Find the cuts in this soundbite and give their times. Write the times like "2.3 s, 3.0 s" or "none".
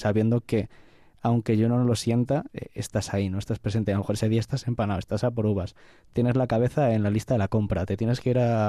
none